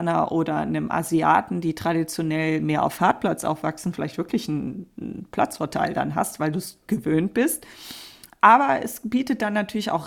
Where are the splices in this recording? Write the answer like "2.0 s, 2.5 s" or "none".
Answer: none